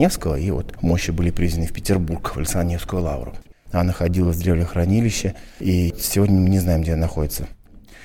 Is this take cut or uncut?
uncut